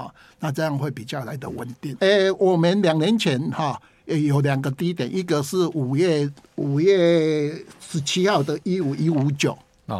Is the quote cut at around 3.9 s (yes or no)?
no